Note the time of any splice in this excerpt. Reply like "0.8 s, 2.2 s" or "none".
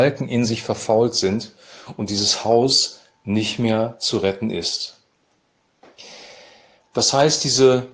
6.9 s